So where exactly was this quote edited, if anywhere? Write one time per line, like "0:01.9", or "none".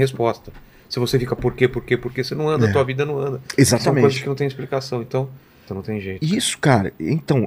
0:05.7